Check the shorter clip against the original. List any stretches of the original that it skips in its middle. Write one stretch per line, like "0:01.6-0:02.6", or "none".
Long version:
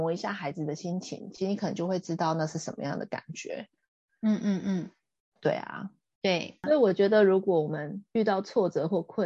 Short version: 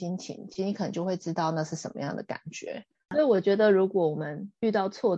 0:03.9-0:06.6